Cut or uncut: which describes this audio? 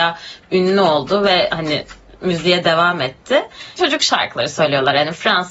cut